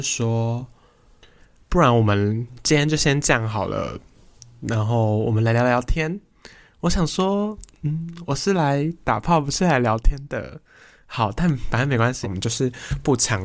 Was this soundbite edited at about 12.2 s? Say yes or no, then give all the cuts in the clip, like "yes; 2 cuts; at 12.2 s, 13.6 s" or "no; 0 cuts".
yes; 1 cut; at 12.2 s